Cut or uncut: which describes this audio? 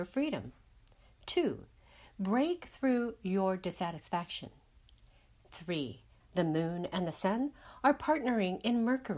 cut